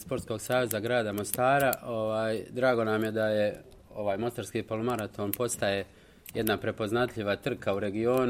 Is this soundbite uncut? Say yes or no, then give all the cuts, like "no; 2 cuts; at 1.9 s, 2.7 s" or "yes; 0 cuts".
yes; 0 cuts